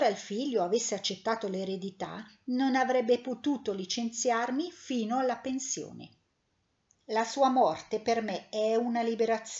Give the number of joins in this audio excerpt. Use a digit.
1